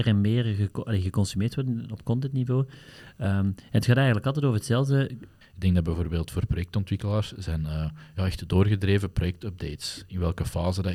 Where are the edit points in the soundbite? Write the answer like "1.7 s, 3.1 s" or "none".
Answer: 5.4 s